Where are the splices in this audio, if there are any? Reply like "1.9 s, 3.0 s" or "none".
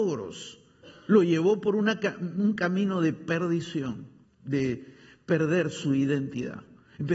4.2 s